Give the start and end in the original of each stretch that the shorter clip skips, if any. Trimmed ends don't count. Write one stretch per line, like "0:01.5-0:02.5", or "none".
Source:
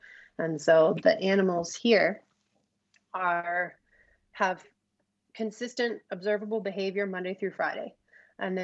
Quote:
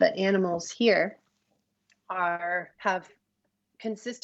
0:03.8-0:04.3